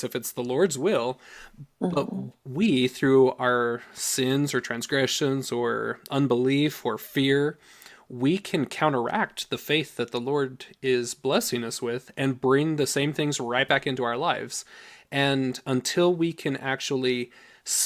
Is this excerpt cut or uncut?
uncut